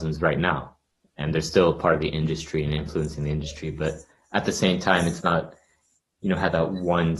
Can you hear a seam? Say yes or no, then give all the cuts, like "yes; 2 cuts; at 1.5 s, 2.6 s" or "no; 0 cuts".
no; 0 cuts